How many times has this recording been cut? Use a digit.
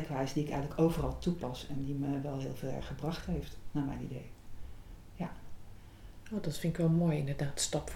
0